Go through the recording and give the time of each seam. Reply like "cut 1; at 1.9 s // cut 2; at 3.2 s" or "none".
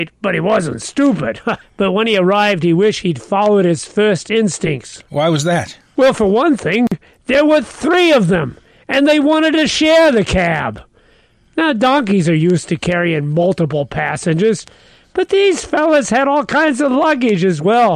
cut 1; at 1.6 s